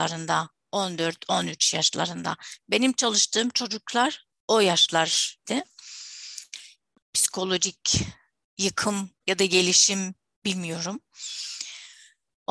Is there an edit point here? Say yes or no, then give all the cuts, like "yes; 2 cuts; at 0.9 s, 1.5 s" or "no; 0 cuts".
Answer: yes; 2 cuts; at 5.5 s, 9.2 s